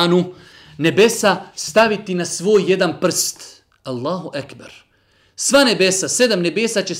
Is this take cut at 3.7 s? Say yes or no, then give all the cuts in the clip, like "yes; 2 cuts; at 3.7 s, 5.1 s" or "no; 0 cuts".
no; 0 cuts